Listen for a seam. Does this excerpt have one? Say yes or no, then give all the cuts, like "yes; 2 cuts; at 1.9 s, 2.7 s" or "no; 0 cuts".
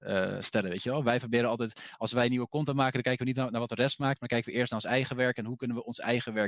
no; 0 cuts